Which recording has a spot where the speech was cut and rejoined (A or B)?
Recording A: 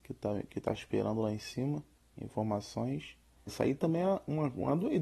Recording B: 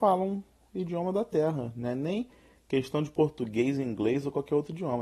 A